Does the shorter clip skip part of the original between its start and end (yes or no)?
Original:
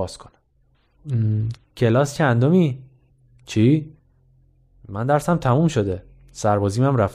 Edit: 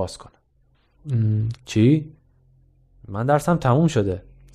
yes